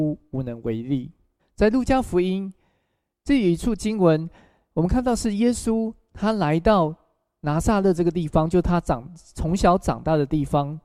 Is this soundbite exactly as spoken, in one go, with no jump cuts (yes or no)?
no